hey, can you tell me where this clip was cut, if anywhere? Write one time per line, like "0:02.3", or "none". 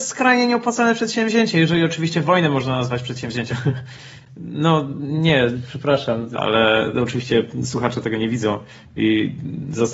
0:03.5
0:06.3